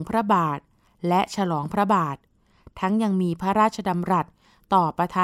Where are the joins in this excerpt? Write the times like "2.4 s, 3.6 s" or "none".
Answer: none